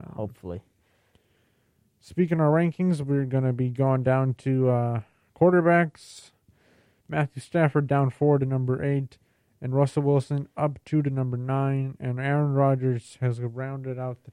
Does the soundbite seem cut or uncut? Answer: cut